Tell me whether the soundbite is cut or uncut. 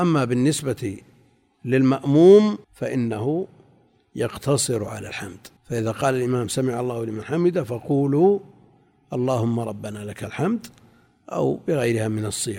cut